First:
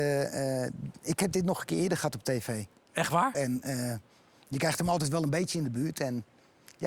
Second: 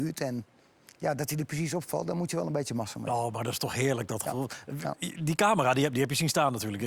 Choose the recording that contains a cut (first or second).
first